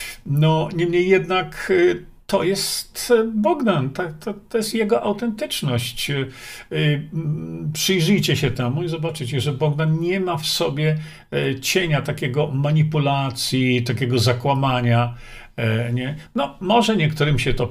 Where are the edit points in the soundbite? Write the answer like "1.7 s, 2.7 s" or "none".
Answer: none

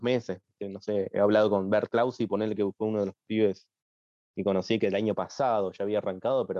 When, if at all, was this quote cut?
none

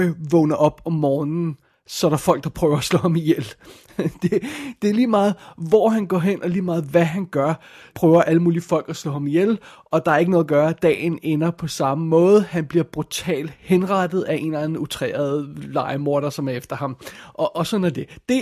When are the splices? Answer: 7.9 s

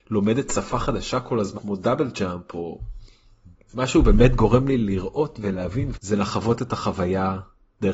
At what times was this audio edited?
1.5 s, 3.7 s, 5.9 s

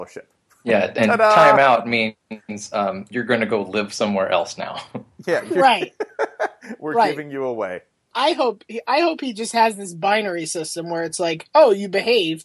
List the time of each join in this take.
8.1 s

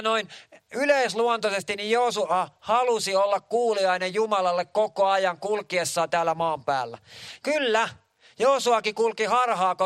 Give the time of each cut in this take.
7.4 s

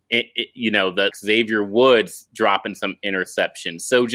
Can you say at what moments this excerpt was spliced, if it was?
1.1 s

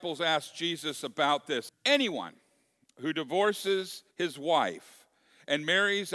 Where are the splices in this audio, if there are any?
1.7 s, 4.1 s

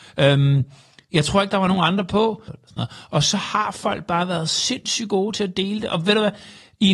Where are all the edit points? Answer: 2.5 s

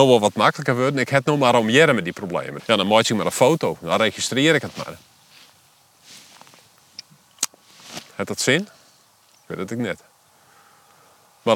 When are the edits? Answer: 2.6 s

